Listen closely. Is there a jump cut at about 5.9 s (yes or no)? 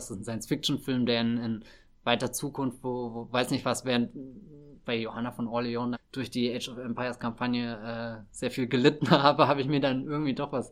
yes